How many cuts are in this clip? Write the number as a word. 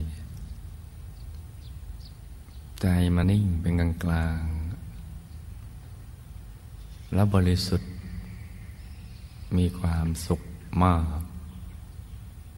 one